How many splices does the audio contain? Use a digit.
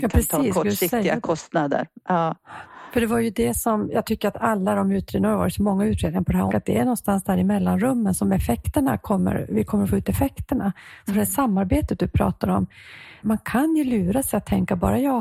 2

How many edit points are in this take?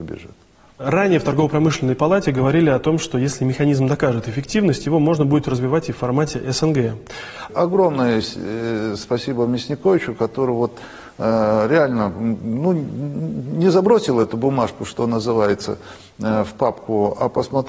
1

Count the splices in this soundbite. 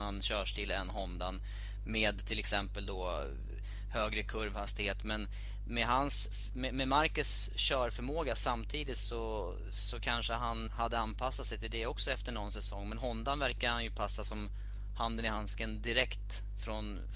1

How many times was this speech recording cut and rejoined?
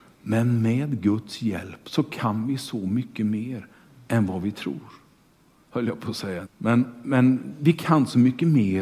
1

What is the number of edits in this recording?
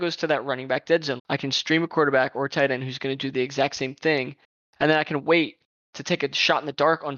1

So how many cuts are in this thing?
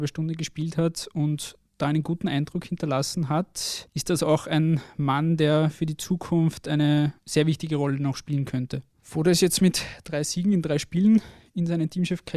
1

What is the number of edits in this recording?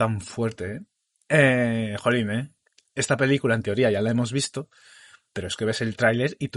1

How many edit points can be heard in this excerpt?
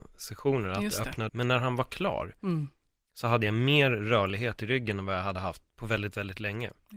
1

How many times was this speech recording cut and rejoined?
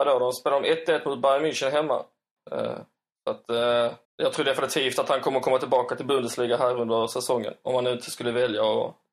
2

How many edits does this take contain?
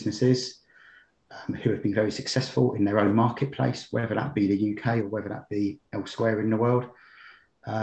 0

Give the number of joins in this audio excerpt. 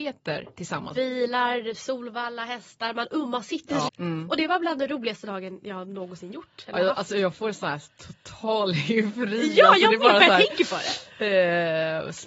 2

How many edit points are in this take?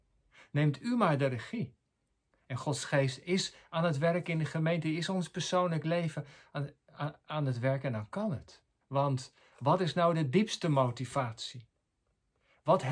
1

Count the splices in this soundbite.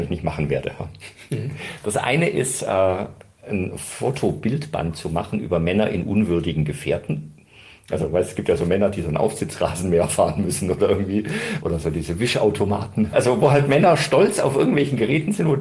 2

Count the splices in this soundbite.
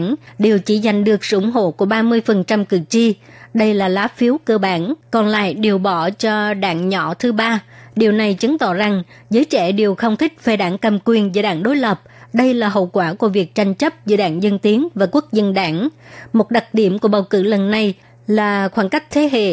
0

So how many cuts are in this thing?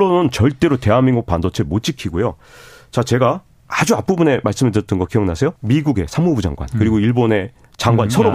1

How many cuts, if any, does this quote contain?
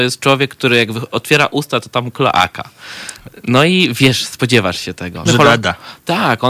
1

